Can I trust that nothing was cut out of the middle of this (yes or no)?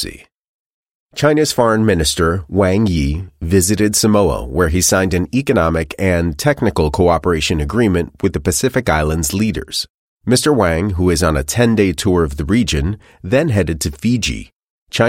yes